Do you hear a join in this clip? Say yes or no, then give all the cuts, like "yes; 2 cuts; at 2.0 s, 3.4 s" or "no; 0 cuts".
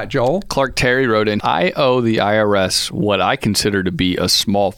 yes; 1 cut; at 1.4 s